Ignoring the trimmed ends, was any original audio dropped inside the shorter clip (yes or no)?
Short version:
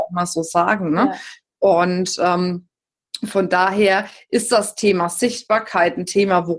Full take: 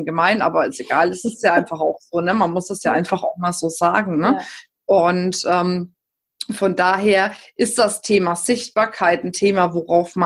no